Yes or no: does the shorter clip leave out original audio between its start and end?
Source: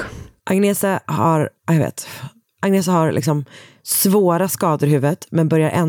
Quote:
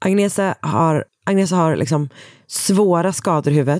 yes